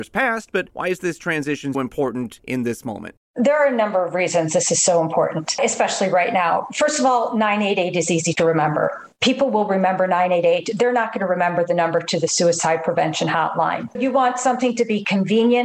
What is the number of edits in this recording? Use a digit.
1